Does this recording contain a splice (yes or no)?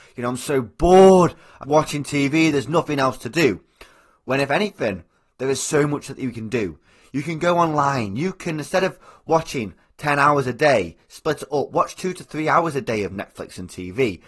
yes